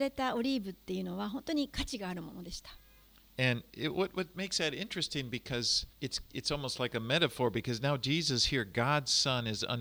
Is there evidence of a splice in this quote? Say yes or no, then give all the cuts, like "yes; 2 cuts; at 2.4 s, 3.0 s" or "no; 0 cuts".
yes; 1 cut; at 5.9 s